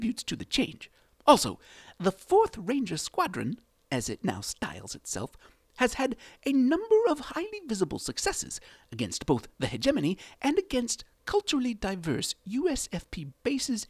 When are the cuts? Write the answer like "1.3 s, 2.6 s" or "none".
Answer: none